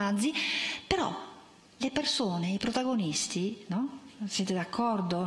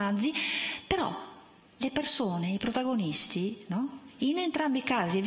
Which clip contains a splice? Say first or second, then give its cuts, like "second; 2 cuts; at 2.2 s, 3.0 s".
second; 1 cut; at 4.2 s